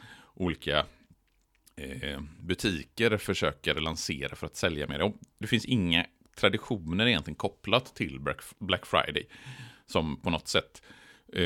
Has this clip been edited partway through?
yes; 1 cut; at 5.4 s

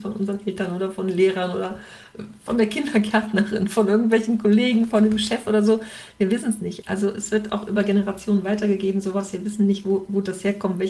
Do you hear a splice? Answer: yes; 1 cut; at 6.8 s

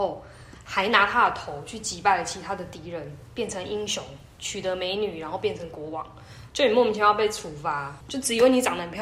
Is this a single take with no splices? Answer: no; 2 cuts; at 6.5 s, 8.0 s

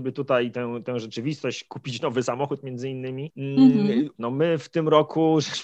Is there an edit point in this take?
yes; 1 cut; at 4.1 s

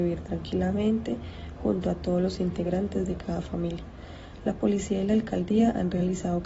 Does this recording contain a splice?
no; 0 cuts

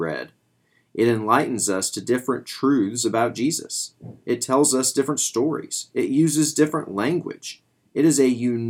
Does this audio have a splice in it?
no; 0 cuts

